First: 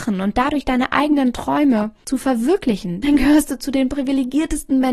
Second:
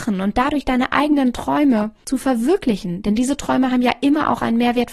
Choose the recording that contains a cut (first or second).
first